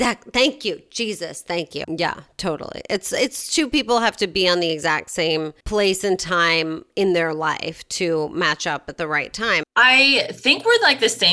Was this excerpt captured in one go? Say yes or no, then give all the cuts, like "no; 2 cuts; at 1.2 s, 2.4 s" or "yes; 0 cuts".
no; 3 cuts; at 1.8 s, 5.6 s, 9.6 s